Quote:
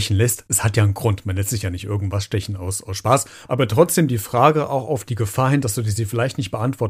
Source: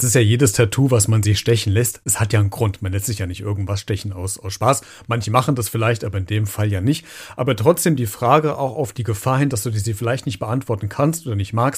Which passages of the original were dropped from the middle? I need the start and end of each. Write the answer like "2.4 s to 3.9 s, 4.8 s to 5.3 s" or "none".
5.0 s to 7.3 s